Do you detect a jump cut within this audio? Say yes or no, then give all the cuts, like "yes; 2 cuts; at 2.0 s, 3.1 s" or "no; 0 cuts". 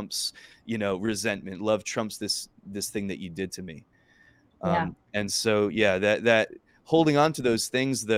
no; 0 cuts